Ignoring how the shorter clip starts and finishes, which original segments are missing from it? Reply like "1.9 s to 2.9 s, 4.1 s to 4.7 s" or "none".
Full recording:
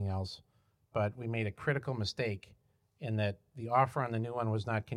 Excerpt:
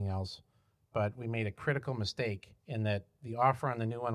2.6 s to 2.9 s